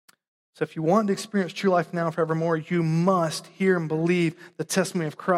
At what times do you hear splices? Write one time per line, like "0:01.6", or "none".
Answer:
none